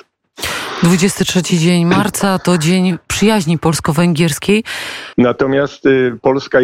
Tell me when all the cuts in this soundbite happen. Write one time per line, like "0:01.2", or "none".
0:05.1